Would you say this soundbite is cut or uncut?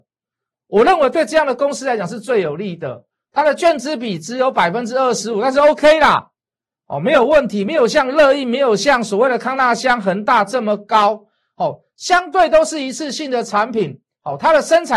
uncut